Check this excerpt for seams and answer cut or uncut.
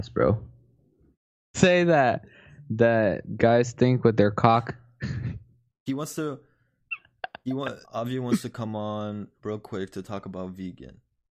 cut